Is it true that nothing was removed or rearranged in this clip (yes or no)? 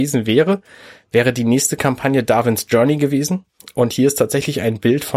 yes